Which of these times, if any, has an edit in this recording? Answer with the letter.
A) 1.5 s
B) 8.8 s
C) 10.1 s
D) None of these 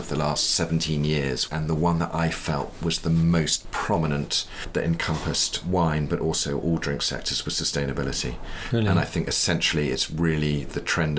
A